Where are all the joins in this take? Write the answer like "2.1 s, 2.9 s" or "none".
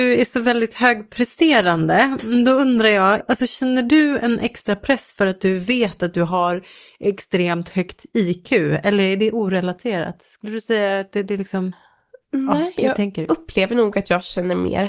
3.2 s

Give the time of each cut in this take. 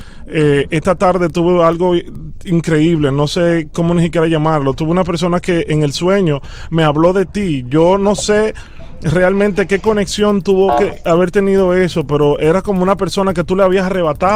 none

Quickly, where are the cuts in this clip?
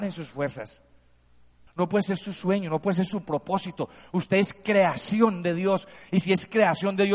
1.7 s

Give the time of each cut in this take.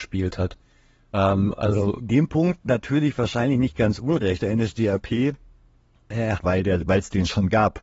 4.4 s, 6.4 s

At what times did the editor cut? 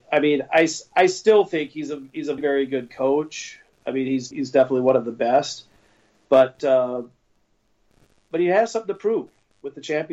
2.4 s, 4.3 s

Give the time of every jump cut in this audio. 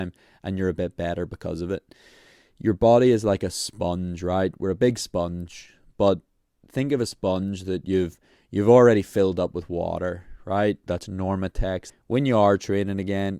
10.9 s, 11.9 s

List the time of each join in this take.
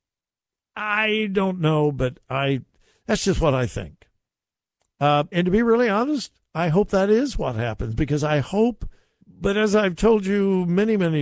5.3 s, 9.2 s

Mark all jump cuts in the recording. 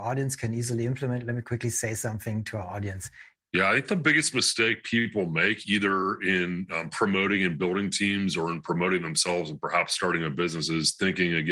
3.4 s

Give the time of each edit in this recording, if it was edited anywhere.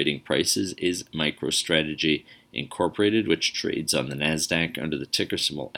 none

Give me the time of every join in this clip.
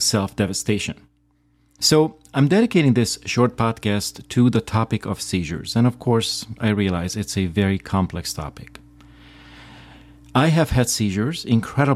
1.8 s

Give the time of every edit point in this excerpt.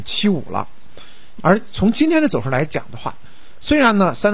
1.4 s

